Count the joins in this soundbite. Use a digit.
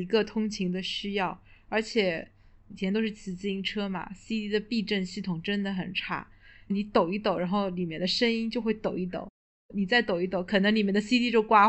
0